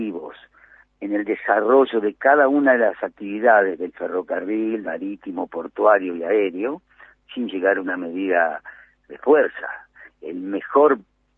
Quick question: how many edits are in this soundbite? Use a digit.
1